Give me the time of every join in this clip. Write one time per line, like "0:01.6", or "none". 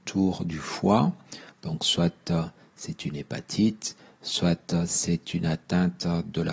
none